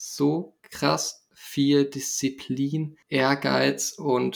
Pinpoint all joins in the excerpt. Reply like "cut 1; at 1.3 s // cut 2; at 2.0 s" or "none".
cut 1; at 3.0 s